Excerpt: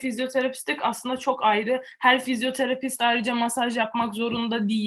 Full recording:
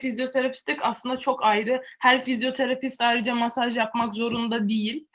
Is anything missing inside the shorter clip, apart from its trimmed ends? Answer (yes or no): no